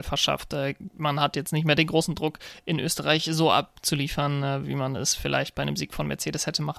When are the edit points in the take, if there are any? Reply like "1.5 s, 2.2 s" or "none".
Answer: none